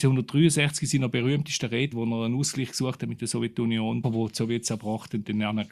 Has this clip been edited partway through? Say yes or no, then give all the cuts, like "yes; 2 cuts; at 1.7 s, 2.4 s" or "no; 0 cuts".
yes; 2 cuts; at 1.9 s, 4.0 s